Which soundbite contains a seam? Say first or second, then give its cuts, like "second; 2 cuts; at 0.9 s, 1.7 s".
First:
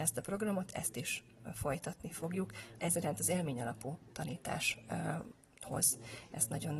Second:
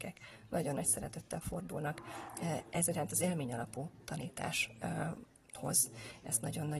first; 1 cut; at 2.8 s